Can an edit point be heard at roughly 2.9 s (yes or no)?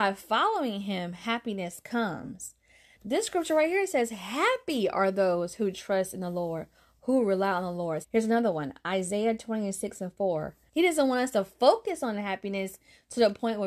yes